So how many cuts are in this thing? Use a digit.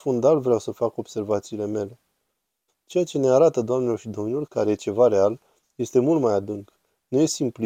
2